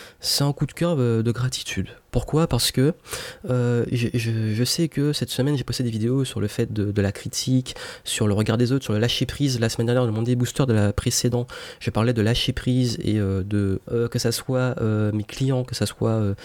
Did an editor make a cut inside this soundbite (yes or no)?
yes